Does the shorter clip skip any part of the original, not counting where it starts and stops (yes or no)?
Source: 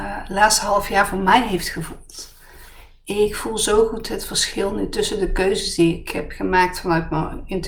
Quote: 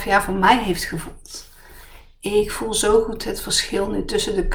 no